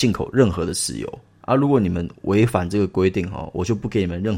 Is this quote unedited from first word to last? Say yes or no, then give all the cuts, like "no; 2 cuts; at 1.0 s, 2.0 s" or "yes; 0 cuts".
yes; 0 cuts